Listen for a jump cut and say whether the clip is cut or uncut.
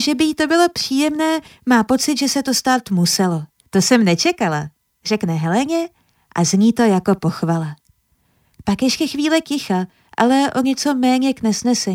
cut